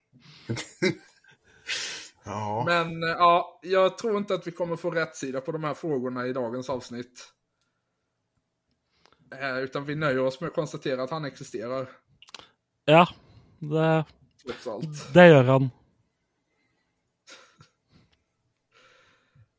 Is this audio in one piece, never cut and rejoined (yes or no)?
yes